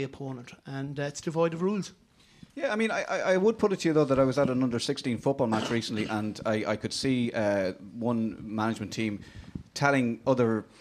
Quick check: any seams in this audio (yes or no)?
no